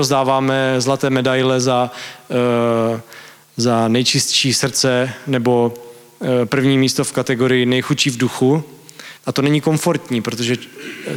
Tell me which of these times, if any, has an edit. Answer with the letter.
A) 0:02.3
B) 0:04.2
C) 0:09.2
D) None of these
C